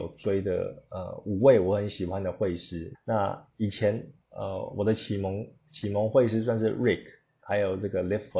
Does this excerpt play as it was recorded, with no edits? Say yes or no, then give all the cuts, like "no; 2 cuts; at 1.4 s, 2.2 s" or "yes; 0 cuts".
no; 2 cuts; at 2.9 s, 4.2 s